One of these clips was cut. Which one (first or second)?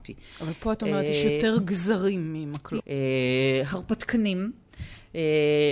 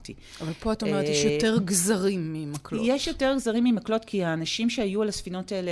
first